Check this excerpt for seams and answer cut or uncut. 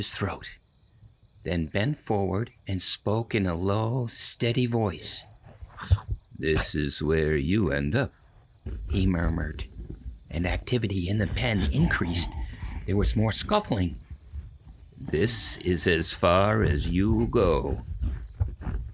cut